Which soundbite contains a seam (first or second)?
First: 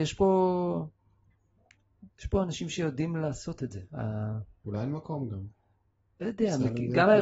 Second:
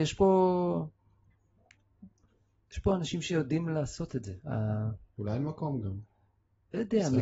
first